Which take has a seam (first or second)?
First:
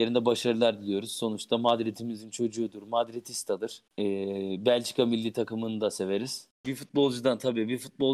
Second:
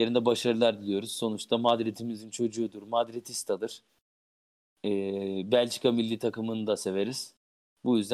first